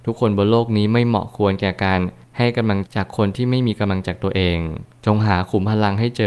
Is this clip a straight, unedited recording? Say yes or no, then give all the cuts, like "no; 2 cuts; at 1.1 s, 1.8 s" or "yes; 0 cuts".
no; 2 cuts; at 2.9 s, 4.0 s